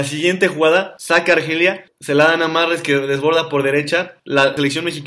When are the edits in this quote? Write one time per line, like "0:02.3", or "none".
none